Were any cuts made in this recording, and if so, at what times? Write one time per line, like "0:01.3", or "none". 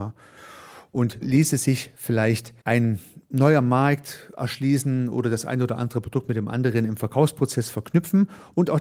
0:01.2
0:02.6